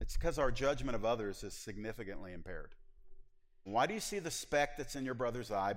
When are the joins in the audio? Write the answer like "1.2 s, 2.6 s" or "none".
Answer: 3.7 s